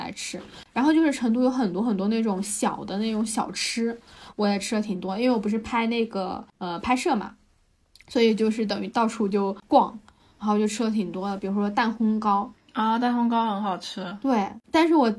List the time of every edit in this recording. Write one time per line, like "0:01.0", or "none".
none